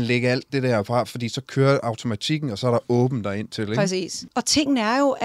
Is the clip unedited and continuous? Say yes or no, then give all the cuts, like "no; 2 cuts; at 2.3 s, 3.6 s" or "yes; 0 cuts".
yes; 0 cuts